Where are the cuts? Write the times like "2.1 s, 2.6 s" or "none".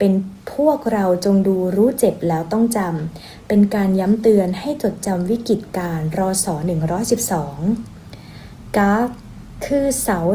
none